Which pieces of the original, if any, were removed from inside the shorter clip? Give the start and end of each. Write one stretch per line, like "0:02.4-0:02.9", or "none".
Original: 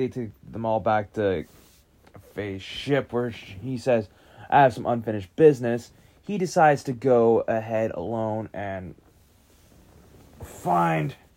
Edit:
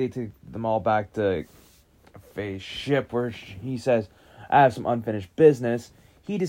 none